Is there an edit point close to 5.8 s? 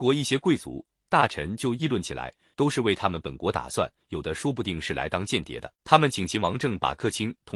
yes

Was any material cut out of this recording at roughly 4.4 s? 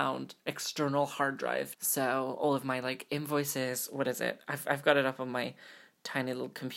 no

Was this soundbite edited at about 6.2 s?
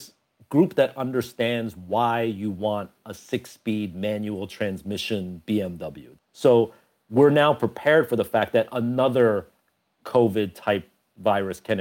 yes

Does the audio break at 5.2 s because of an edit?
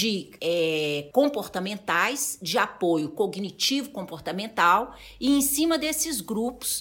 no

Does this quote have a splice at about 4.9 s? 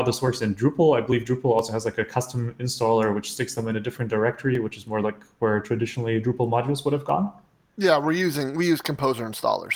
no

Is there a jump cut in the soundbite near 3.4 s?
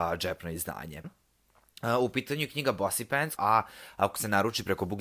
yes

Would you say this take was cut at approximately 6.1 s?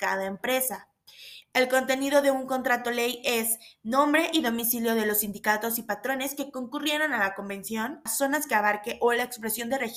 no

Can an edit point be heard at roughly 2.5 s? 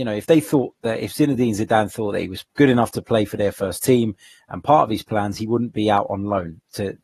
yes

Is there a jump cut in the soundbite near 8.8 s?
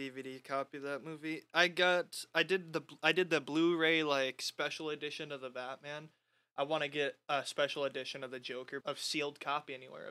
yes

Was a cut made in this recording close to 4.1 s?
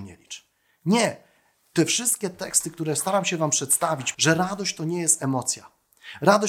yes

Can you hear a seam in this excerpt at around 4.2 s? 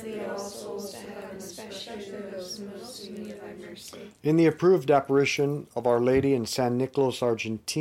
no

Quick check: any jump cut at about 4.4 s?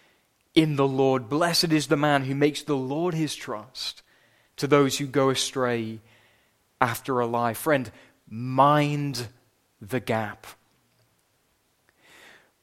yes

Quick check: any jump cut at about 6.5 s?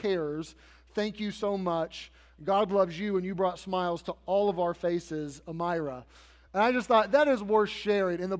no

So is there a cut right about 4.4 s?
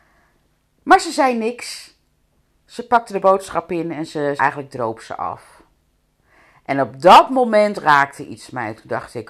yes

